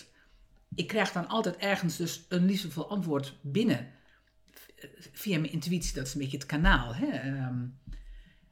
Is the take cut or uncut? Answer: uncut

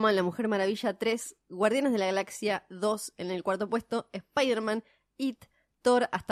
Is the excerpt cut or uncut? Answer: uncut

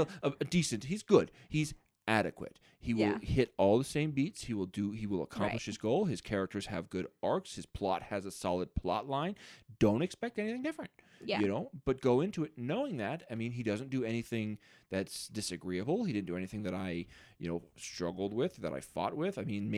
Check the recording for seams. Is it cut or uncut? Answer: uncut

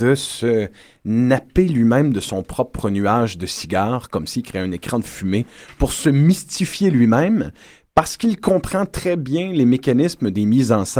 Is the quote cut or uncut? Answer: uncut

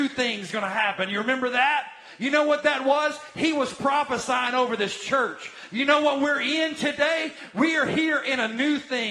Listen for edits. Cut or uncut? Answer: uncut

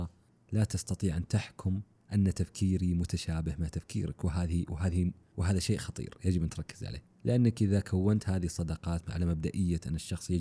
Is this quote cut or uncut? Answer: uncut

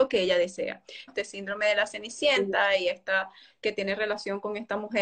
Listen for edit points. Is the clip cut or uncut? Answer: cut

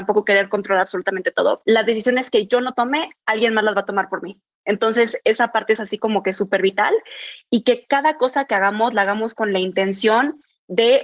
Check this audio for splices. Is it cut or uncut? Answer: cut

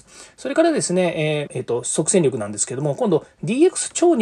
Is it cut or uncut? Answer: cut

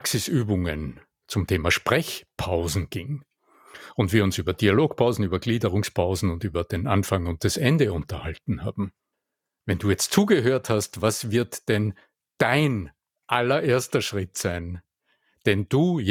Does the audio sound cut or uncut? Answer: uncut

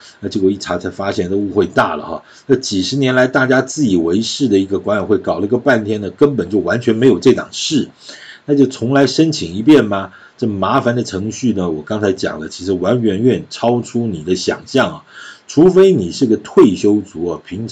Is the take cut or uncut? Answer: uncut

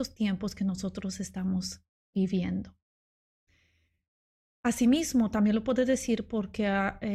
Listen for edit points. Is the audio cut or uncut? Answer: uncut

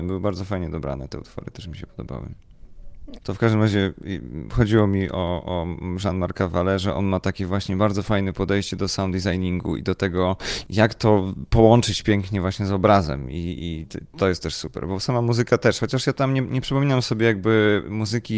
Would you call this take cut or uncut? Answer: cut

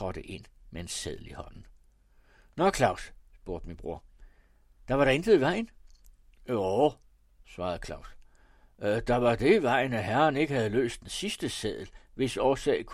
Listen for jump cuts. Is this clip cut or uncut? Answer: uncut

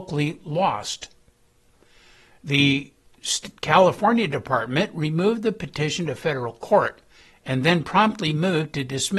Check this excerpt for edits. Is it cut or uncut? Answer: uncut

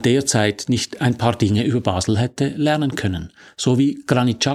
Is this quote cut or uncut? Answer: uncut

